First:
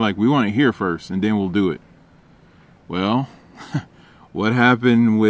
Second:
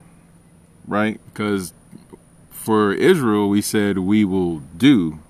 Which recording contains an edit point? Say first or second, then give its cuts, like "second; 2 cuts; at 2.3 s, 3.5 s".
second; 1 cut; at 1.2 s